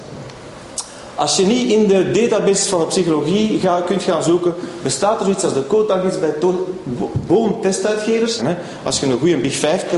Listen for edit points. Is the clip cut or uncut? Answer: cut